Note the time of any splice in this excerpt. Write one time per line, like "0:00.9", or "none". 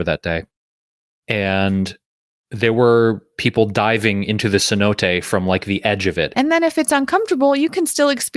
0:01.1
0:06.3